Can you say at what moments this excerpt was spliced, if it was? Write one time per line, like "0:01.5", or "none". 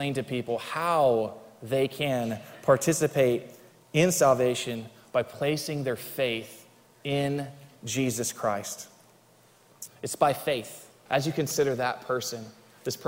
0:09.9
0:11.1